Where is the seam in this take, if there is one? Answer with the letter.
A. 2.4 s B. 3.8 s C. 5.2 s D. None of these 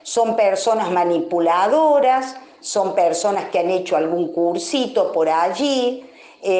D